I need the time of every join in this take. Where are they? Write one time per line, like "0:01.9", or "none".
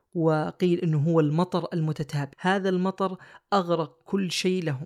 0:02.3